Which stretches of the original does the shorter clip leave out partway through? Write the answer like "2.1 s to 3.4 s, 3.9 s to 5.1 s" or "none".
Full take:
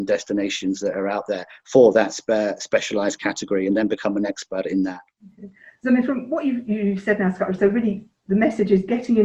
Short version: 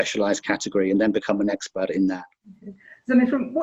none